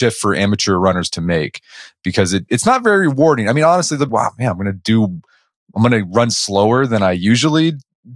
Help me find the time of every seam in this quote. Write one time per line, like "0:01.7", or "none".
0:04.1